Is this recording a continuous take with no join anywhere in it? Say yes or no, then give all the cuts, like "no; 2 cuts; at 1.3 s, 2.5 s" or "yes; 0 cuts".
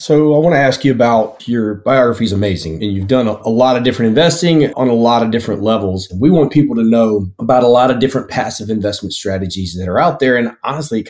no; 1 cut; at 6.1 s